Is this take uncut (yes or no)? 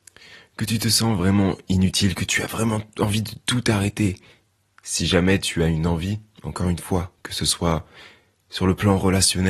no